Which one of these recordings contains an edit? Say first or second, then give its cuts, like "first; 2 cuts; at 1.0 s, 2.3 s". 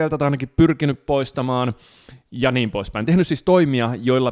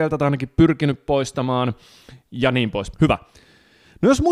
second; 1 cut; at 2.9 s